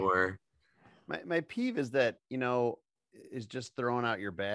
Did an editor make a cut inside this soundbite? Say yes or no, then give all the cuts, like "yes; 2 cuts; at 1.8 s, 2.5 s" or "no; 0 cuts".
no; 0 cuts